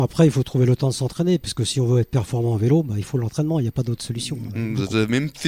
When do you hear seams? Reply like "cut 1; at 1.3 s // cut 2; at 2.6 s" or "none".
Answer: cut 1; at 4.5 s